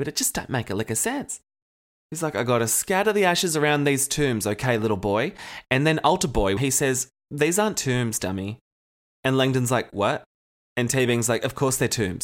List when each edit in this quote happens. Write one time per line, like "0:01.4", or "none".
0:06.6